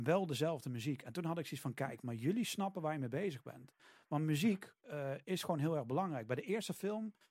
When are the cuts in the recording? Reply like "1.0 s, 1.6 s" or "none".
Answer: 4.8 s

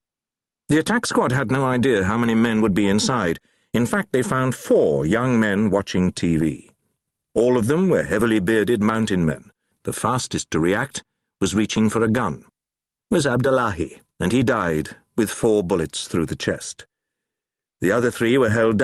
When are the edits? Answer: 9.7 s, 13.0 s, 14.1 s

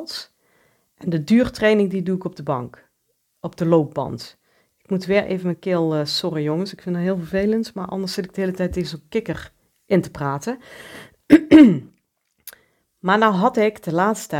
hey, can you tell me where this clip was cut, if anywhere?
none

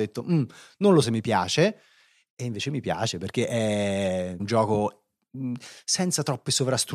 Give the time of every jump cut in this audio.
1.0 s, 4.4 s

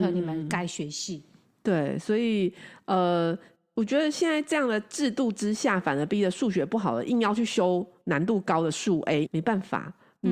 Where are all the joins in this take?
9.3 s

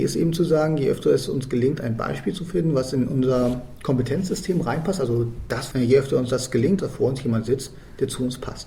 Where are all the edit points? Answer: 5.7 s, 6.8 s

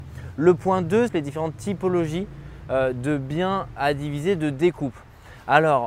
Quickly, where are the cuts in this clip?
1.1 s, 3.8 s

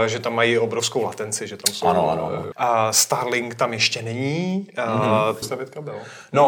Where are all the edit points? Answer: 2.5 s, 5.4 s

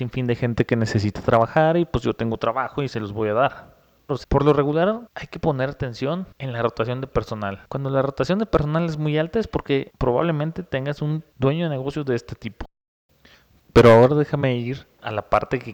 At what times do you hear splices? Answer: 4.1 s

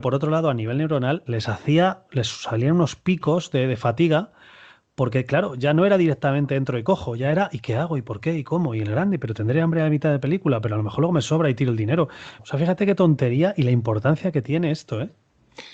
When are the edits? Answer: 1.3 s, 12.4 s

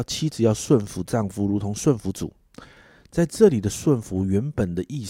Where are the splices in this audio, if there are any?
none

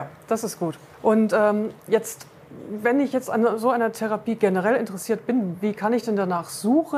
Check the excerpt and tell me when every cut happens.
none

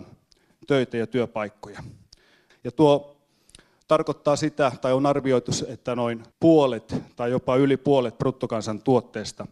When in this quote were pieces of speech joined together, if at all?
2.5 s, 6.3 s

